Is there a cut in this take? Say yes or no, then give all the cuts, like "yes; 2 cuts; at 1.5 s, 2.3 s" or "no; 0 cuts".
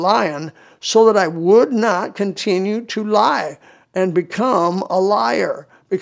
no; 0 cuts